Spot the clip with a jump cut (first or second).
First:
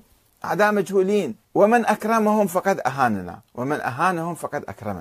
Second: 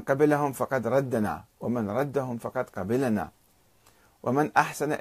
first